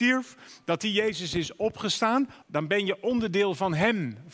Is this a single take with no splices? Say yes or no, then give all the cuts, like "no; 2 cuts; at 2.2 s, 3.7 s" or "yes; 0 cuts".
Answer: no; 1 cut; at 2.4 s